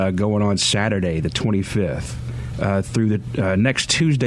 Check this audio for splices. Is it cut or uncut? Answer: cut